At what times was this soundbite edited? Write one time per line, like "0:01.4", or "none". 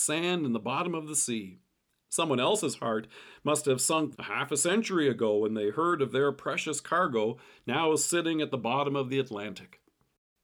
0:04.1